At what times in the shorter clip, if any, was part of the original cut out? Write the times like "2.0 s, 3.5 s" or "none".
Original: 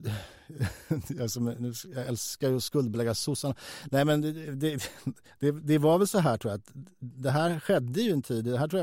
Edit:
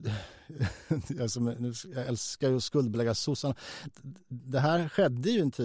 3.9 s

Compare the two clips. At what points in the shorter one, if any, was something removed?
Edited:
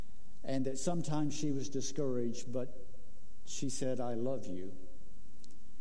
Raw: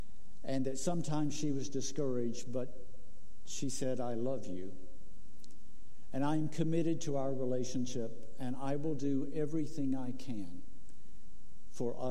none

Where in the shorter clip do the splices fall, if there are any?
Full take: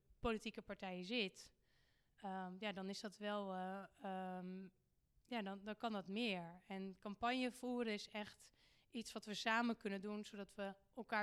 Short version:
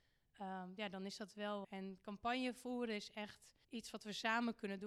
1.6 s, 3.6 s

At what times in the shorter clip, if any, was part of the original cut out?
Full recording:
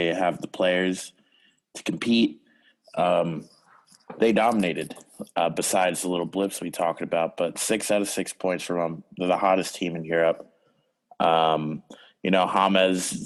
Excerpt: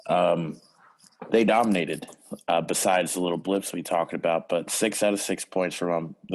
none

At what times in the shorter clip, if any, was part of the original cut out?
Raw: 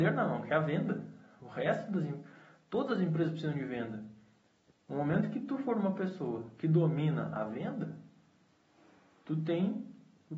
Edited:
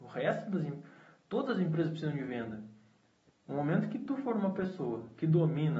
none

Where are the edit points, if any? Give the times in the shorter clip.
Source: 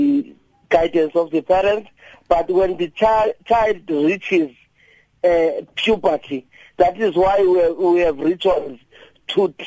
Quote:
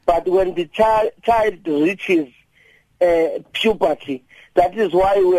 none

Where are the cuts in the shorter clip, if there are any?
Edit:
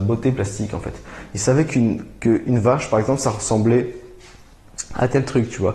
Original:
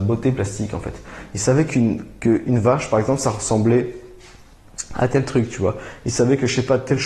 none

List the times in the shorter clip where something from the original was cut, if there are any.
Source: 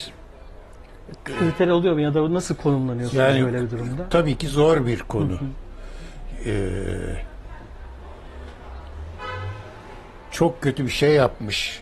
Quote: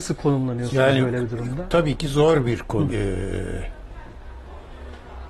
2.9 s

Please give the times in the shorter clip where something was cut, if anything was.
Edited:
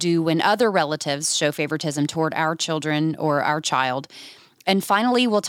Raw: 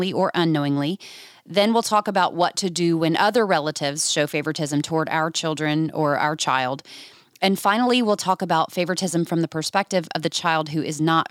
none

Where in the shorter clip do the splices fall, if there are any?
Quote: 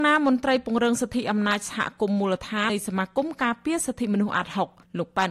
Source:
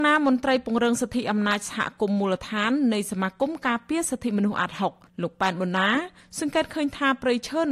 2.7 s

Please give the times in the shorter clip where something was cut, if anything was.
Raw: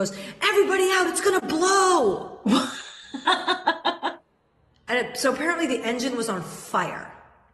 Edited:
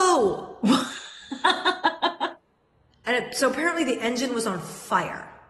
none

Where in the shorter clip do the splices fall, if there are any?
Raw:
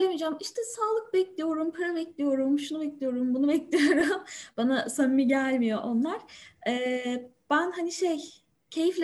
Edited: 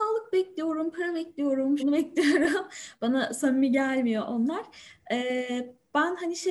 1.8 s

